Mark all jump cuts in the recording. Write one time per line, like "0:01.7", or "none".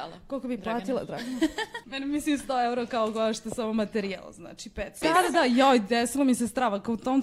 0:01.8
0:05.0